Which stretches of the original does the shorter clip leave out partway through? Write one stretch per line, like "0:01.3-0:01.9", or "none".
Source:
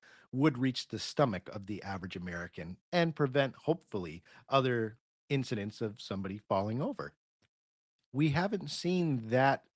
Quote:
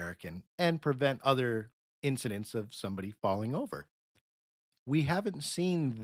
0:03.5-0:04.5